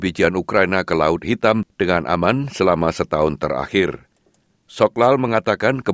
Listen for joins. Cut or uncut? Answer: cut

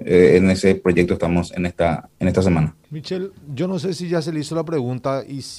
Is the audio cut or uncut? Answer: cut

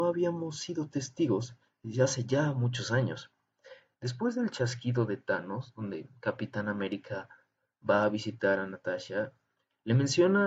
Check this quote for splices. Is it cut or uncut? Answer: cut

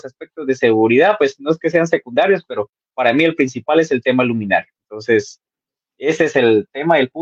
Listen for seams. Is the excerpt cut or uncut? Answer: uncut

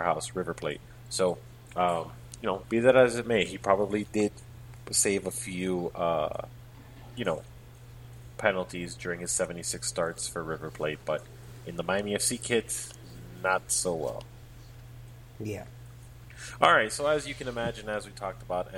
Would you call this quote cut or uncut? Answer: uncut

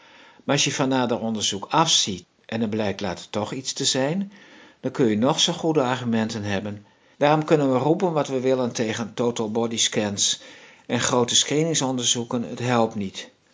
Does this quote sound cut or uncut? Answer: cut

